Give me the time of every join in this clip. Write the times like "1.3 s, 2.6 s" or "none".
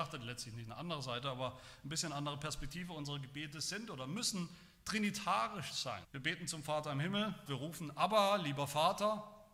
6.0 s, 7.5 s